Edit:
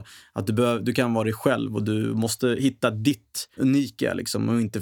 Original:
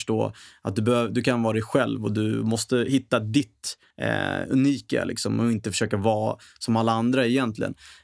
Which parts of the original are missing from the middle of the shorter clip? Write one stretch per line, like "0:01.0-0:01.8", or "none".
0:03.9-0:04.5